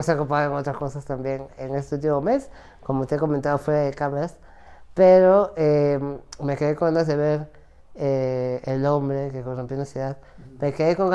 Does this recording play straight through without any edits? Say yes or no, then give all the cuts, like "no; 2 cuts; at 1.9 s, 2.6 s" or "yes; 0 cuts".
yes; 0 cuts